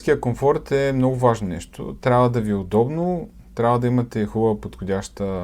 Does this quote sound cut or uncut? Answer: uncut